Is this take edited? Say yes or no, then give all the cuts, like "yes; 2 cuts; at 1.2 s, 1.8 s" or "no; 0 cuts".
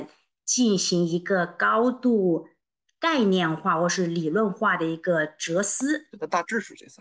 yes; 1 cut; at 6.1 s